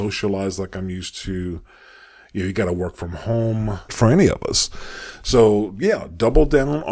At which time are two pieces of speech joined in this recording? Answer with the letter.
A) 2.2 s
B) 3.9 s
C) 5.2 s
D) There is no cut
B